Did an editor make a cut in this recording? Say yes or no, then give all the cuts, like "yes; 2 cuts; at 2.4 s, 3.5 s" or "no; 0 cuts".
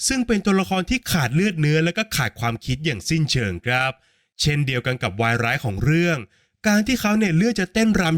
no; 0 cuts